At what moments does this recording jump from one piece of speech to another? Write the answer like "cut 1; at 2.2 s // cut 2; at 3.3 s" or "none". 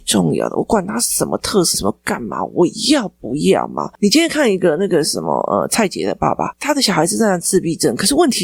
cut 1; at 1.7 s